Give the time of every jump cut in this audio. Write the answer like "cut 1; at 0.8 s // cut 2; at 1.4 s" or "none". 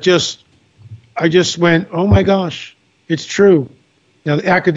none